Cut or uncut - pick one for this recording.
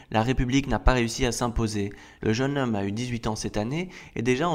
cut